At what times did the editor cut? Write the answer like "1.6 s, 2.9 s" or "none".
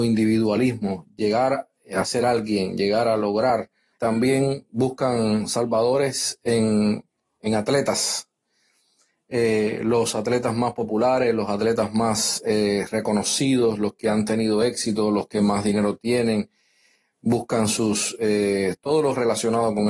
3.9 s

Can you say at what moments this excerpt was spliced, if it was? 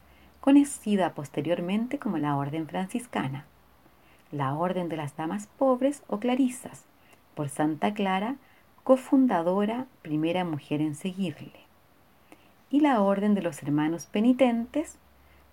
none

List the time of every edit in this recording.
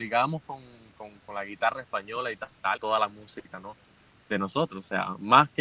2.8 s

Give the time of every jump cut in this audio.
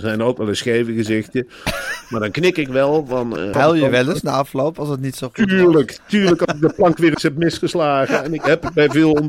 3.5 s

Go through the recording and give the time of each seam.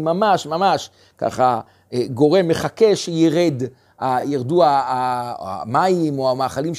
none

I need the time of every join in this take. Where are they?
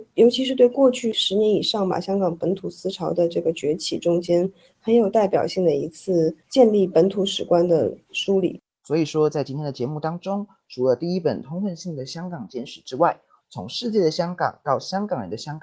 13.4 s

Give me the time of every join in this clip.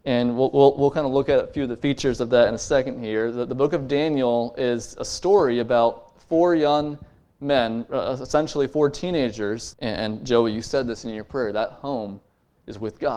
9.7 s

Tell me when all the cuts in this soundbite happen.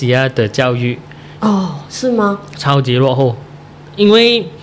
1.4 s

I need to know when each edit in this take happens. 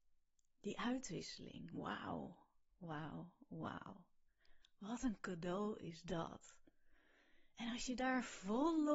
none

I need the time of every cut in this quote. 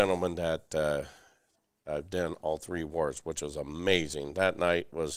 none

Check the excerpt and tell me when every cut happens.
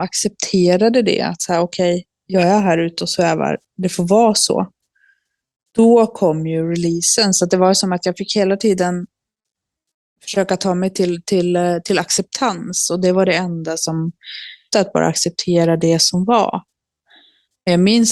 14.7 s

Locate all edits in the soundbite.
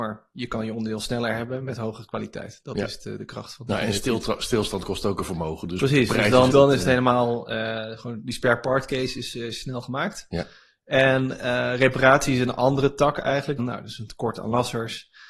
6.5 s, 13.6 s

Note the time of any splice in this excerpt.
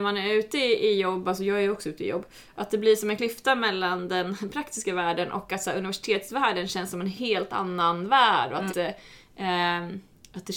8.7 s

